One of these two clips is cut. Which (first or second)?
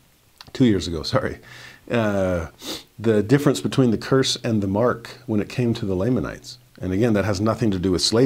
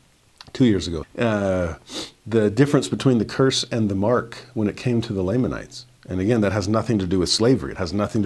second